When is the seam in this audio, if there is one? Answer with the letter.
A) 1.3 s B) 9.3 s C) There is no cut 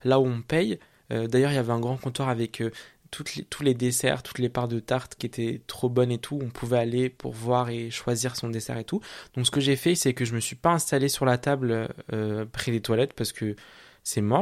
B